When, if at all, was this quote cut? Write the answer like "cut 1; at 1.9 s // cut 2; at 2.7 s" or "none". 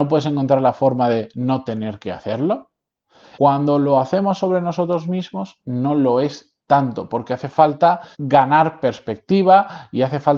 cut 1; at 3.3 s // cut 2; at 8.1 s